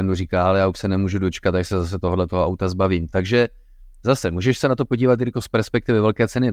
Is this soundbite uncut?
yes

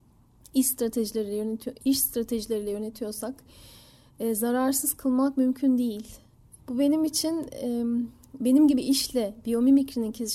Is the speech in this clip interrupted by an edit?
yes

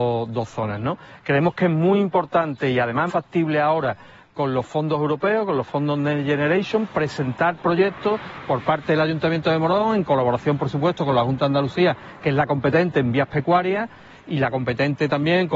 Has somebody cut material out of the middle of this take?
yes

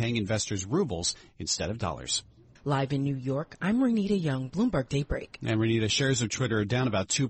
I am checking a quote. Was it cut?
yes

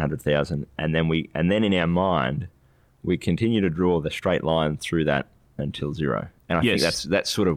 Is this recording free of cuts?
yes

